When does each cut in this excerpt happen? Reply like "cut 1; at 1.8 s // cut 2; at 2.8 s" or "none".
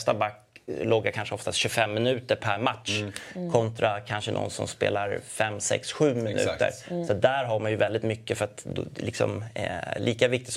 none